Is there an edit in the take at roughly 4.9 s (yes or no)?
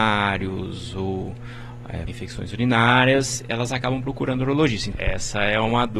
yes